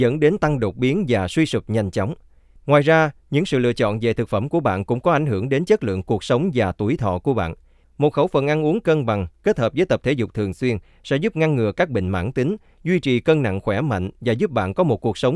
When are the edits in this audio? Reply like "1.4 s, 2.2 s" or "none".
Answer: 2.6 s, 7.8 s